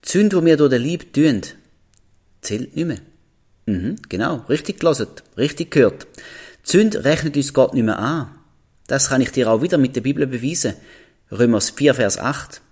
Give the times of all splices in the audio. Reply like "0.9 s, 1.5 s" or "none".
none